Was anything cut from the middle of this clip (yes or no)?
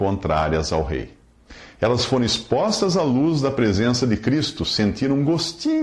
no